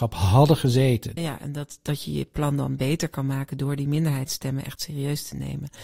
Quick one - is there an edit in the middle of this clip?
yes; 1 cut; at 1.2 s

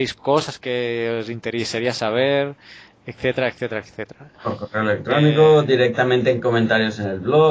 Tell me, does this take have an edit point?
yes; 1 cut; at 4.4 s

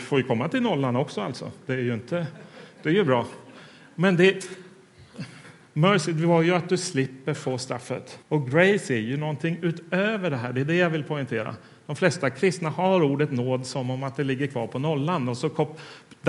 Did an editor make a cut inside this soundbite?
yes; 1 cut; at 8.2 s

